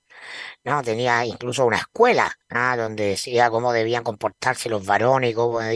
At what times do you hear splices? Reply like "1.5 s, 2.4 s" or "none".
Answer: 2.4 s